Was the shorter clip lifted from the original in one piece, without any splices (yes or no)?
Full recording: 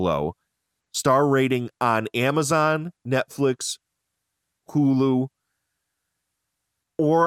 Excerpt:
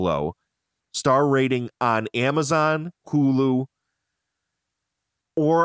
no